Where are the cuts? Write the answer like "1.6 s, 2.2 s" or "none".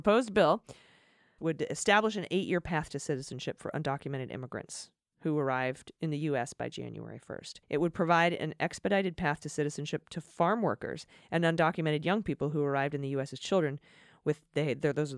1.4 s, 7.6 s